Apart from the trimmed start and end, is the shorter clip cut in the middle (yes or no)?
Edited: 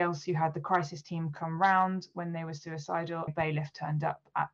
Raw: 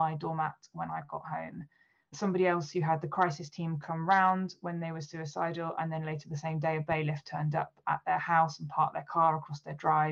yes